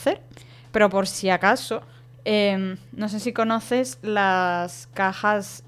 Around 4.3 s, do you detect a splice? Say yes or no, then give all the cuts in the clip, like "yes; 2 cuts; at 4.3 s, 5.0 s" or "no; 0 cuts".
no; 1 cut; at 2.1 s